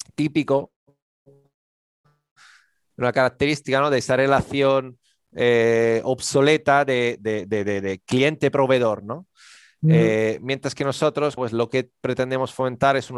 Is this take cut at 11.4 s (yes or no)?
yes